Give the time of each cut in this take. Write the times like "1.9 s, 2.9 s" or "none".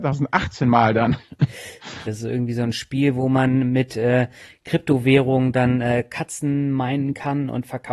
2.0 s

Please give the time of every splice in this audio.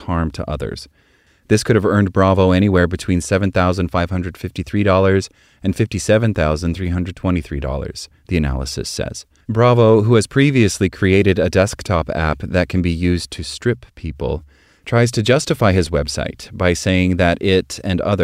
1.3 s, 9.4 s

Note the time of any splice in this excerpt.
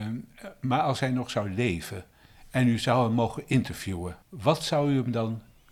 4.2 s

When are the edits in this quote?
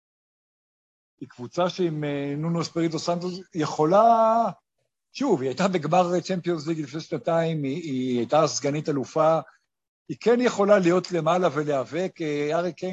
none

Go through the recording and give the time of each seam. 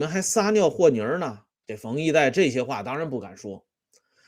1.6 s

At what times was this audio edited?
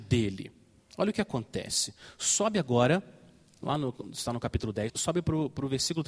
4.9 s

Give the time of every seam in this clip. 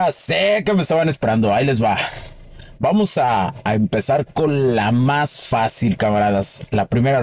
none

